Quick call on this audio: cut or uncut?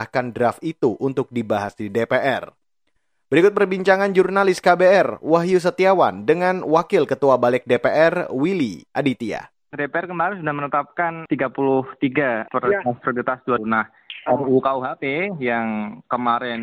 cut